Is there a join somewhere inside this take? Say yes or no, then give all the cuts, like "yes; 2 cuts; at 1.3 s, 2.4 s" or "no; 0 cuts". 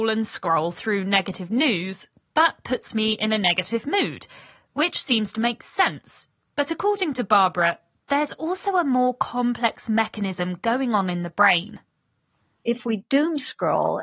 no; 0 cuts